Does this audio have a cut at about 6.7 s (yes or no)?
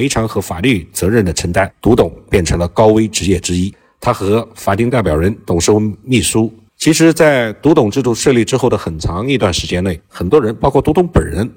yes